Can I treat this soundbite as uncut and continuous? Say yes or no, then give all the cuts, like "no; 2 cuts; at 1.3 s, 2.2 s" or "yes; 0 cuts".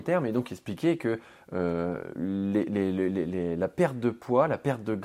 yes; 0 cuts